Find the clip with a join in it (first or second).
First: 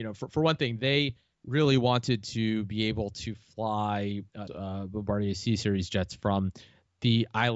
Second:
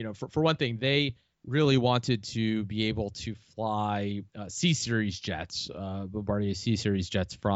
first